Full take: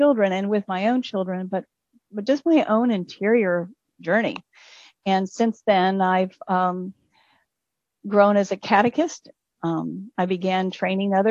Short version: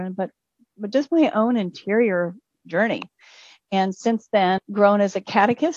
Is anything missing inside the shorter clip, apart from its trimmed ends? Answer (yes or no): yes